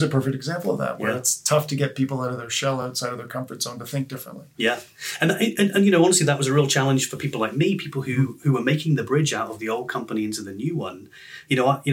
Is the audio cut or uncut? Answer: uncut